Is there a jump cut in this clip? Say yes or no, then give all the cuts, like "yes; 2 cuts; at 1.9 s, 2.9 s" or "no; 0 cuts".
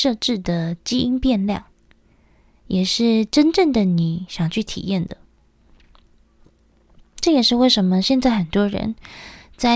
no; 0 cuts